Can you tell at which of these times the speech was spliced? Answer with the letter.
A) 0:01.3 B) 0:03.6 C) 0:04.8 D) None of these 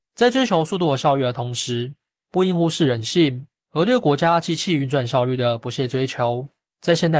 B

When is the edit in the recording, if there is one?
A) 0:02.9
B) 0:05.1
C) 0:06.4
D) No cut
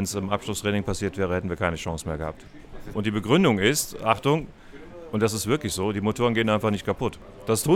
A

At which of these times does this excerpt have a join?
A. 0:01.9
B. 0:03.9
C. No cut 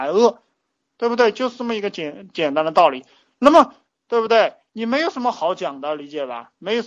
B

